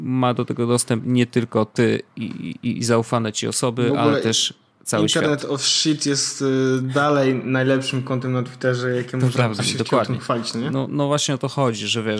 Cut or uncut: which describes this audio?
cut